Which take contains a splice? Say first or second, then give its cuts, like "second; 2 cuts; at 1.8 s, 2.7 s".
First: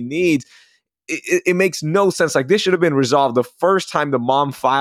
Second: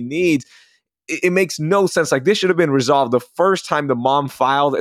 second; 1 cut; at 1.2 s